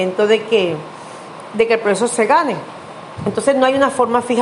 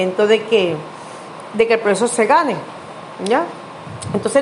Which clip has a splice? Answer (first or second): first